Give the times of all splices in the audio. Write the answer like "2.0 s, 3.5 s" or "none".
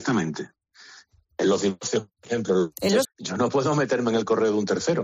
3.0 s